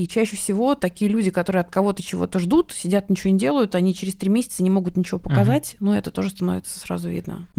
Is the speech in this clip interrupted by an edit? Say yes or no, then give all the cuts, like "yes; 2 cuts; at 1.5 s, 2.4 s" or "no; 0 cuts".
no; 0 cuts